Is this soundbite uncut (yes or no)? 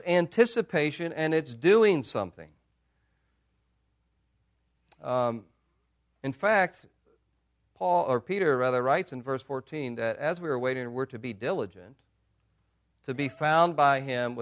yes